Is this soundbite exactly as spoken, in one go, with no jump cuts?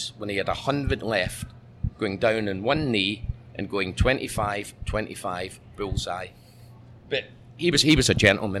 yes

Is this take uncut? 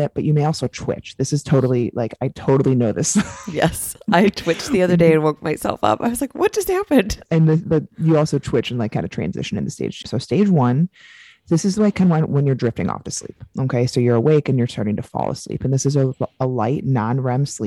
no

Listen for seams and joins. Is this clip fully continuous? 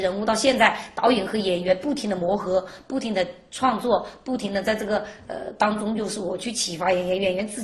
yes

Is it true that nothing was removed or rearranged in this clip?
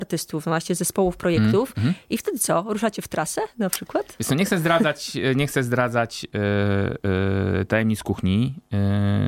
yes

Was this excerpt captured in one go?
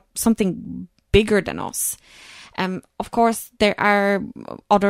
yes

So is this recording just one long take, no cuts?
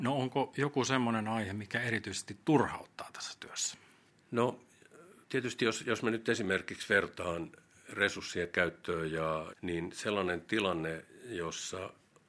no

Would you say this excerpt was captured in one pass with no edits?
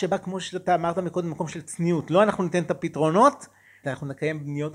no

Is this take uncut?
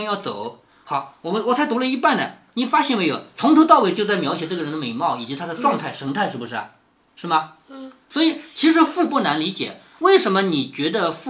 yes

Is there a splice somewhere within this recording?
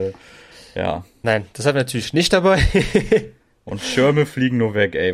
no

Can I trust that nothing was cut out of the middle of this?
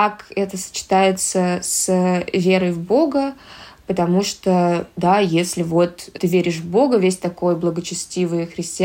no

